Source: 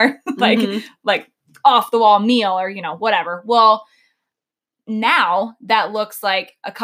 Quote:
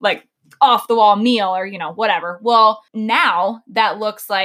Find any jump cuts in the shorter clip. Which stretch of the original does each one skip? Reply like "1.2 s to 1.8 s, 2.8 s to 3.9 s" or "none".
3.9 s to 4.8 s